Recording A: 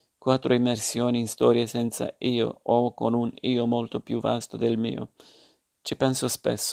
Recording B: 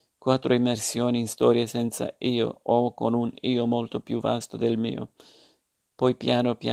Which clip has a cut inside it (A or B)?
B